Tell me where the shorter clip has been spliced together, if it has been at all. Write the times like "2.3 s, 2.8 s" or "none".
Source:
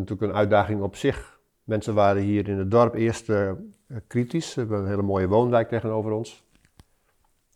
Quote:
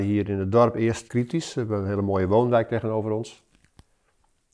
1.1 s